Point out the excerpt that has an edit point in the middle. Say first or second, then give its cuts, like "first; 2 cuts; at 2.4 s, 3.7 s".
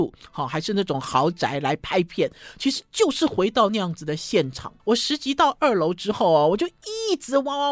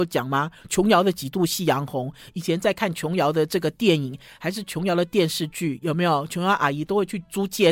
first; 1 cut; at 4.8 s